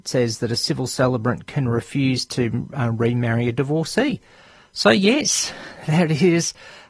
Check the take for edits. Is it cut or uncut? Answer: uncut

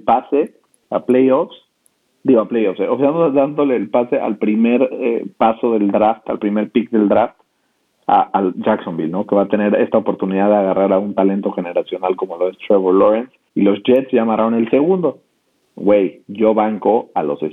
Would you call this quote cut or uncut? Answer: cut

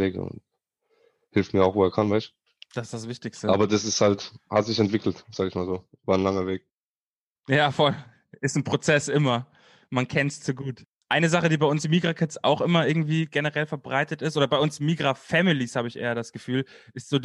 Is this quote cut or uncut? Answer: uncut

